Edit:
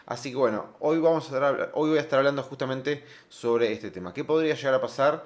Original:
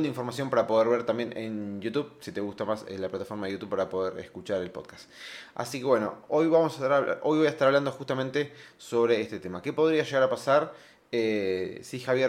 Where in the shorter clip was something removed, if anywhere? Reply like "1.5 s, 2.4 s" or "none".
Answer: none